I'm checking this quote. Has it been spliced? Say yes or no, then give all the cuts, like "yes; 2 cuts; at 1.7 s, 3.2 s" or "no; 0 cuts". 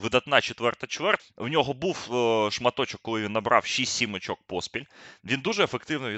yes; 1 cut; at 1.2 s